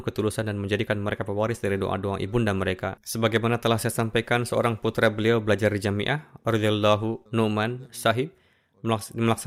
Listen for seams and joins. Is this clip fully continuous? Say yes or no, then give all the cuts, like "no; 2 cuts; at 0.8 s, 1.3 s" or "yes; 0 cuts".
no; 2 cuts; at 3.0 s, 7.3 s